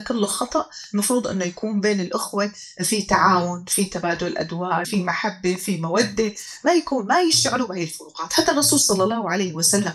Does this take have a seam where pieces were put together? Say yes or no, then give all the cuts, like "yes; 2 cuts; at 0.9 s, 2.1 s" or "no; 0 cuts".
yes; 1 cut; at 4.8 s